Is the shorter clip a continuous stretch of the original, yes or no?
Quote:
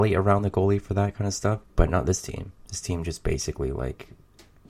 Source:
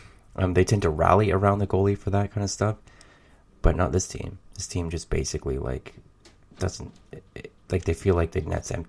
no